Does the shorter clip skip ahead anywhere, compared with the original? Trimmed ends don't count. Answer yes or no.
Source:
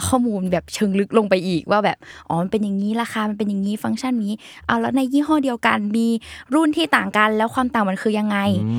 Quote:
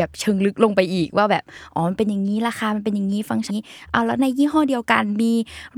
yes